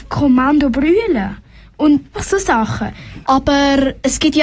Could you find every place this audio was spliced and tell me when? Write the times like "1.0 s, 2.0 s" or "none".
2.1 s, 3.2 s